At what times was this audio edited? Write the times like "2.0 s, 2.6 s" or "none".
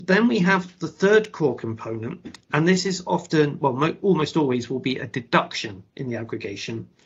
none